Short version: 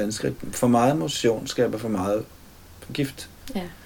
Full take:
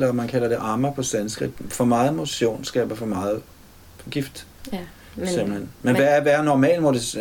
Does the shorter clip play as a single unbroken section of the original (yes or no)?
yes